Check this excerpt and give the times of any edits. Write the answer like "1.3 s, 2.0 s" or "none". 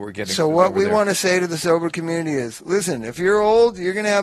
none